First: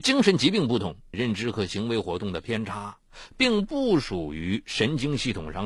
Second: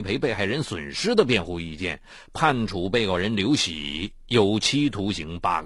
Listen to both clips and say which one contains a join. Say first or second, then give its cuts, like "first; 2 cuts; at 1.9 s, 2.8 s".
first; 1 cut; at 1.1 s